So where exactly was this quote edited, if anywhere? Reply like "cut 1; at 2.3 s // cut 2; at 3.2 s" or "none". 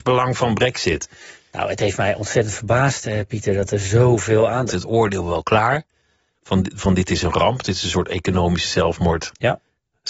cut 1; at 4.7 s // cut 2; at 6.3 s